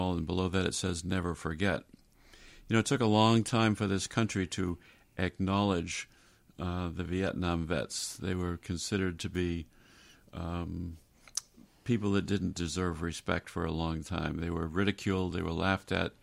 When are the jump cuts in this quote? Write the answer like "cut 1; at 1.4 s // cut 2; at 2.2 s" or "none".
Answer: none